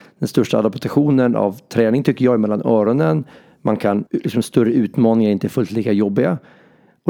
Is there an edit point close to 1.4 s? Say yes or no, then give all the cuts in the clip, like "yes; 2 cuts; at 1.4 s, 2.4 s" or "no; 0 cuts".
no; 1 cut; at 4.1 s